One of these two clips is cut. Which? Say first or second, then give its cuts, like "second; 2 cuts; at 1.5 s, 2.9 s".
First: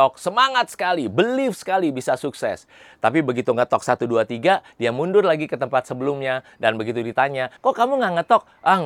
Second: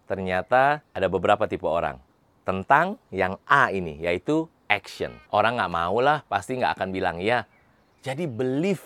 second; 1 cut; at 5.2 s